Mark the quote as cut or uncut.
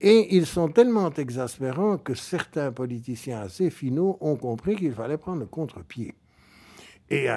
uncut